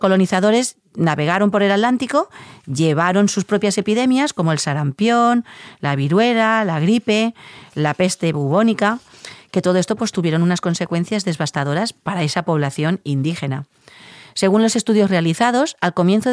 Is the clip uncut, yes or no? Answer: yes